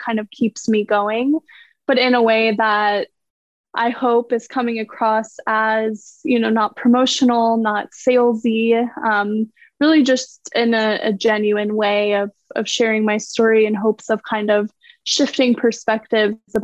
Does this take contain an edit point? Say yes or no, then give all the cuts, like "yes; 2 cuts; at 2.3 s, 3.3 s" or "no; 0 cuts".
no; 0 cuts